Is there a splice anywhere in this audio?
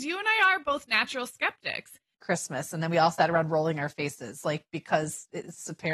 yes; 1 cut; at 2.1 s

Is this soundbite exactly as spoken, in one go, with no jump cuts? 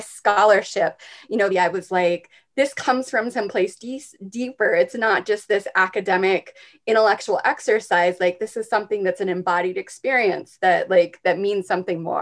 no; 1 cut; at 1.5 s

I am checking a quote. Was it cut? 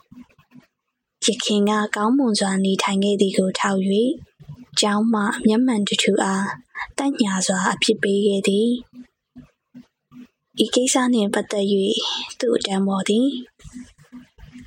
no; 0 cuts

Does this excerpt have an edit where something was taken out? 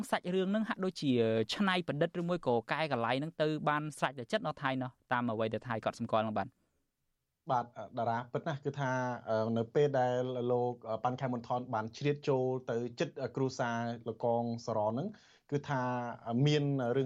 no; 0 cuts

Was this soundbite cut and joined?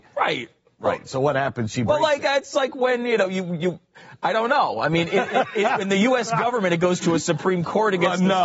no; 0 cuts

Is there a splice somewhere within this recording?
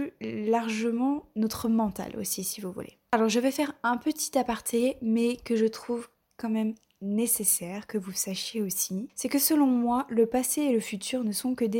no; 0 cuts

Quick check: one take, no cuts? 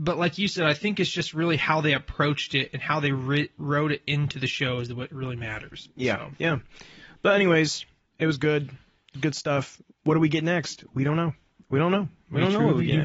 yes; 0 cuts

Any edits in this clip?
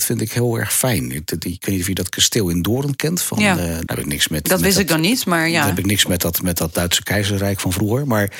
yes; 1 cut; at 3.9 s

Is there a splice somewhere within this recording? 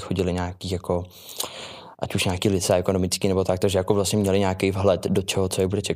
no; 0 cuts

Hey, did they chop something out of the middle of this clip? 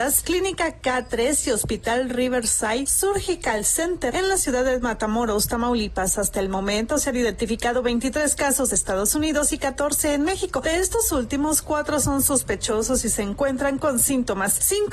yes; 1 cut; at 8.7 s

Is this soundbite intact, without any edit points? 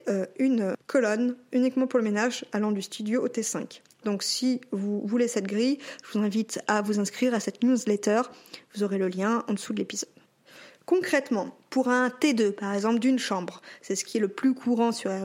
no; 1 cut; at 4.0 s

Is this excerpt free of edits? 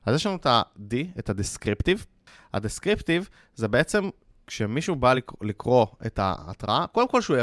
yes; 0 cuts

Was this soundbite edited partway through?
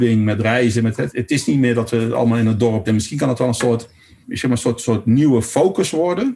yes; 3 cuts; at 1.1 s, 2.8 s, 4.2 s

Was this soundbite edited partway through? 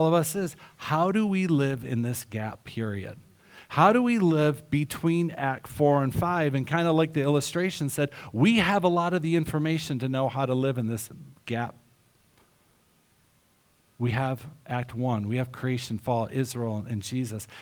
no; 0 cuts

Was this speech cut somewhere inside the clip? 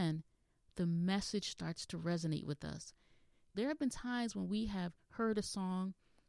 yes; 1 cut; at 3.5 s

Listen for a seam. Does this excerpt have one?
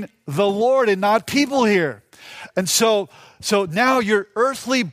no; 0 cuts

